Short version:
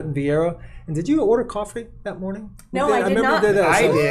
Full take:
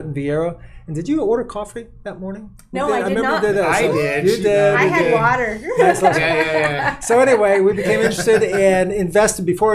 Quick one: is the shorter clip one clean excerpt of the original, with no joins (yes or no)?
yes